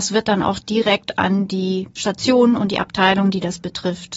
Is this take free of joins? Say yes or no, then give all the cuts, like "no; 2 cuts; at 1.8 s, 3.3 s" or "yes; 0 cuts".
no; 1 cut; at 1.9 s